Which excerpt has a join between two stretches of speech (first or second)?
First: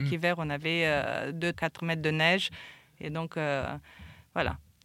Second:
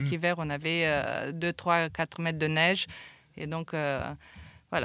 first